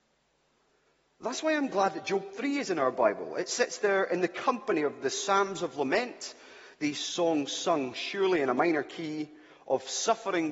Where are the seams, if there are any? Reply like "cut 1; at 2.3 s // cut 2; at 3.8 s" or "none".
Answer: none